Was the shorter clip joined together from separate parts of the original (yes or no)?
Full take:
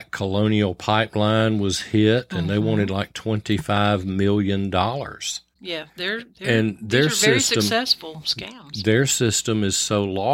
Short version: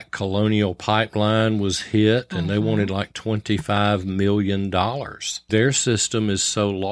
yes